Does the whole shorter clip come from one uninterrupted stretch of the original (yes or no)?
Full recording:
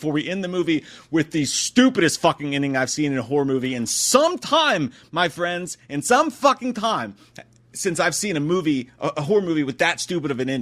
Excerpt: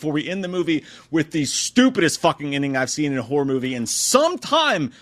yes